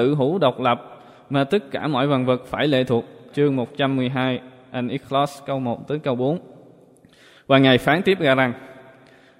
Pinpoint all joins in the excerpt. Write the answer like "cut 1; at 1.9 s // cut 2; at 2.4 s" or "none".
cut 1; at 3.3 s